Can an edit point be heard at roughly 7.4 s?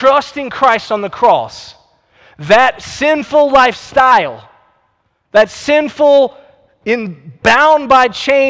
yes; 1 cut; at 7.4 s

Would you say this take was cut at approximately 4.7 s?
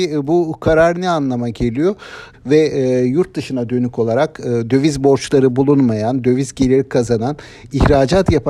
no; 1 cut; at 2.3 s

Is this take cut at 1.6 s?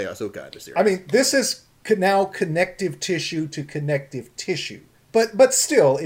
no; 1 cut; at 5.0 s

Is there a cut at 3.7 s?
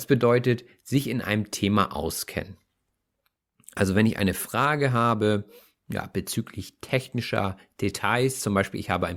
no; 0 cuts

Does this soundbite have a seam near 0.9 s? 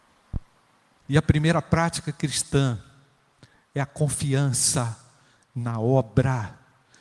yes; 1 cut; at 0.9 s

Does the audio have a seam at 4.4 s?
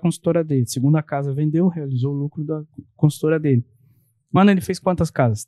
yes; 1 cut; at 4.4 s

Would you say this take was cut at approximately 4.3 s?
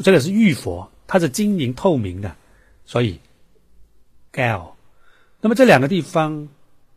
yes; 1 cut; at 4.3 s

